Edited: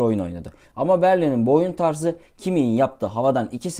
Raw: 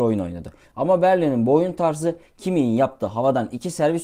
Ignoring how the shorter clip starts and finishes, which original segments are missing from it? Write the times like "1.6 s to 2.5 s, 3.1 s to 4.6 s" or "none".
none

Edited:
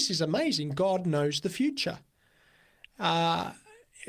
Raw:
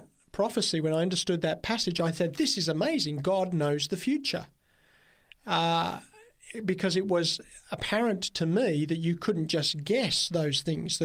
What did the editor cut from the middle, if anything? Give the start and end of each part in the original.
none

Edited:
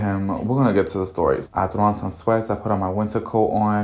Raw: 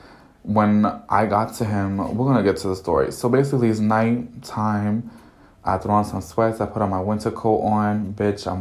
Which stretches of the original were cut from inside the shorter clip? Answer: 3.1 s to 5.6 s

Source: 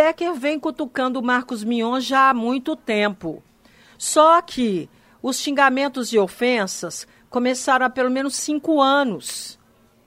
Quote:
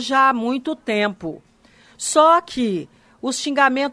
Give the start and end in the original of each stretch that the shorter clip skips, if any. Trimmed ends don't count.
none

